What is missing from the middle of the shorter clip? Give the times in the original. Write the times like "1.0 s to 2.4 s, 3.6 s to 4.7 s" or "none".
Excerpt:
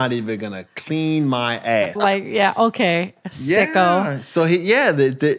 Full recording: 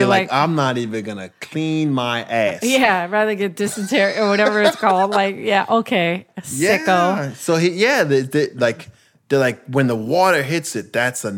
2.6 s to 5.1 s